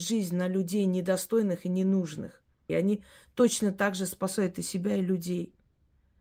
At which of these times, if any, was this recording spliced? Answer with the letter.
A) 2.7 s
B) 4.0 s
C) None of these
A